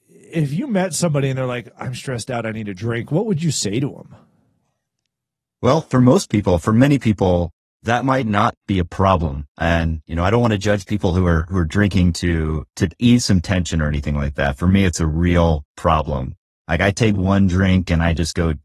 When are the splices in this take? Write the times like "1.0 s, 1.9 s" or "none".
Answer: none